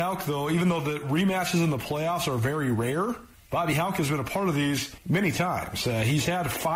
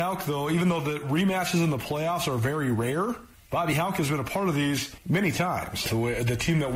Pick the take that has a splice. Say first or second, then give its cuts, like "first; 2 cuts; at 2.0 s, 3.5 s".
second; 1 cut; at 5.8 s